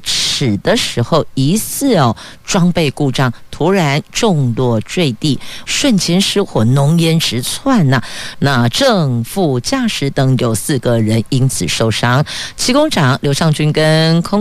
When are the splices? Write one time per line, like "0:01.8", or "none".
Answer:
0:05.7
0:08.3